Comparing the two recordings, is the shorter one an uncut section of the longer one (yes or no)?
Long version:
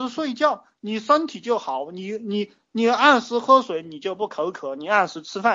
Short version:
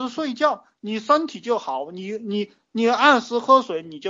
yes